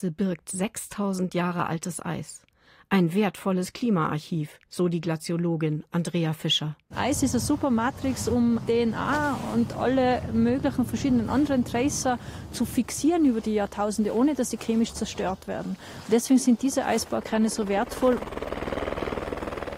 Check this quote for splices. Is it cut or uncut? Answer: uncut